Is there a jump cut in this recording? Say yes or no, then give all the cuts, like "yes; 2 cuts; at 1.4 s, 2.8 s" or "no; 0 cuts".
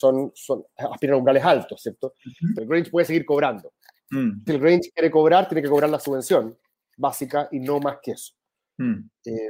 yes; 2 cuts; at 2.6 s, 4.5 s